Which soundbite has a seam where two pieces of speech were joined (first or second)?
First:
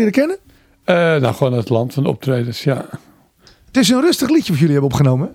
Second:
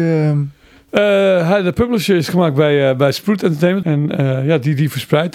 second